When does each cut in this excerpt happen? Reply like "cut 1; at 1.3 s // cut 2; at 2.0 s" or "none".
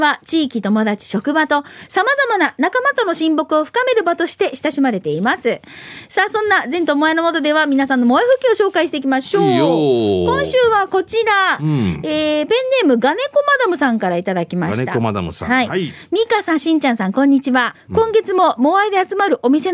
cut 1; at 17.7 s